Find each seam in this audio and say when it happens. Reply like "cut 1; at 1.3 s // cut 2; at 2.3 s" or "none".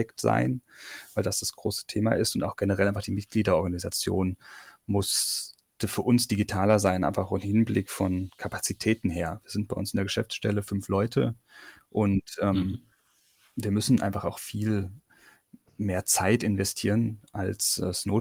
none